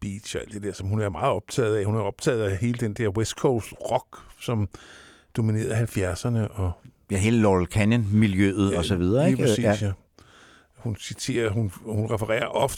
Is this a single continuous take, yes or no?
yes